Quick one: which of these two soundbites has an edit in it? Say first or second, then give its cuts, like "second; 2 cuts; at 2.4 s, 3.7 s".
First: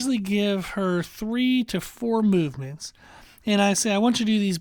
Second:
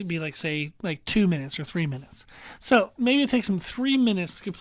second; 1 cut; at 2.6 s